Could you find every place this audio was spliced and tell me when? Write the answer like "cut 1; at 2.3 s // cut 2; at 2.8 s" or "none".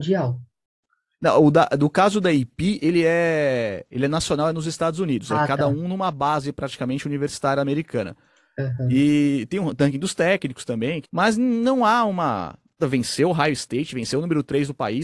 cut 1; at 11.0 s // cut 2; at 12.8 s